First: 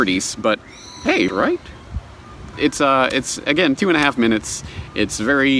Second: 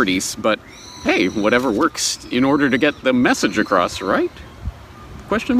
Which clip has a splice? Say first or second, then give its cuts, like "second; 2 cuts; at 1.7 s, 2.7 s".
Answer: first; 3 cuts; at 1.3 s, 2.5 s, 3.8 s